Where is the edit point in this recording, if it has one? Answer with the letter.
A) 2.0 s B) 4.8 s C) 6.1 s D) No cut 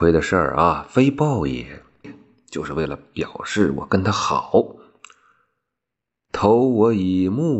A